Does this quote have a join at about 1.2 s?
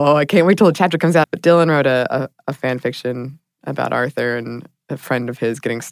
yes; 1 cut; at 1.2 s

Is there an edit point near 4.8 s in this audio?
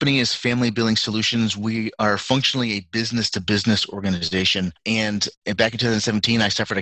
yes; 1 cut; at 4.8 s

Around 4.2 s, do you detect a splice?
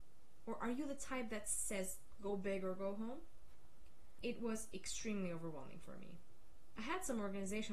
yes; 1 cut; at 4.2 s

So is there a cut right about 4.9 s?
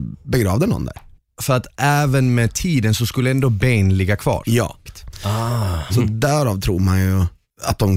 yes; 2 cuts; at 4.9 s, 5.9 s

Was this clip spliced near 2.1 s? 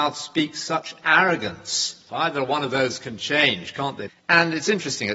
yes; 2 cuts; at 2.1 s, 4.1 s

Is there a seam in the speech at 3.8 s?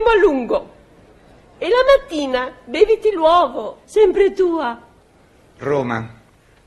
yes; 1 cut; at 3.8 s

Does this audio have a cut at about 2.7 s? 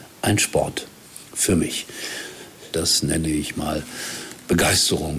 yes; 1 cut; at 2.7 s

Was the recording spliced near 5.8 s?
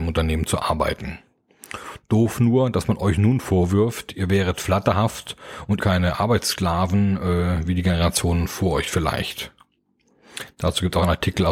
yes; 1 cut; at 5.8 s

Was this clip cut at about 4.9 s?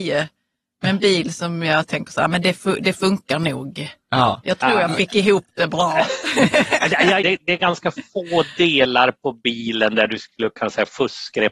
no; 1 cut; at 7.2 s

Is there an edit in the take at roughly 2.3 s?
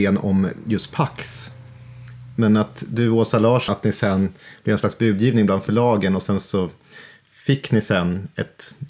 no; 1 cut; at 3.7 s

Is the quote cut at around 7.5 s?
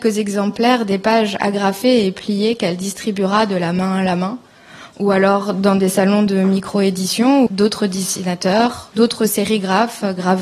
yes; 2 cuts; at 7.5 s, 8.9 s

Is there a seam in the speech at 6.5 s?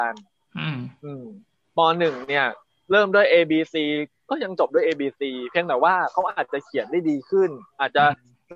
yes; 1 cut; at 6.5 s

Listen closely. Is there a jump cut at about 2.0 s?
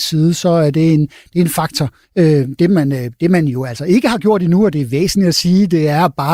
yes; 1 cut; at 2.0 s

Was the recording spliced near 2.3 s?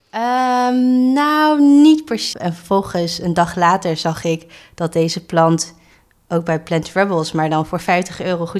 yes; 1 cut; at 2.3 s

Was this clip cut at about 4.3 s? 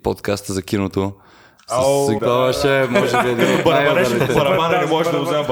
no; 1 cut; at 2.2 s

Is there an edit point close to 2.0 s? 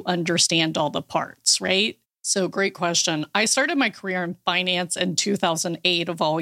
yes; 1 cut; at 2.0 s

